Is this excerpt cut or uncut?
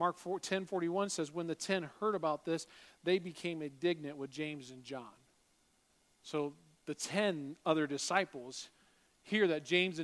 uncut